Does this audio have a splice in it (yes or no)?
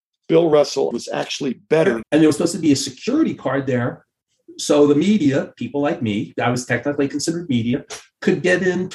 yes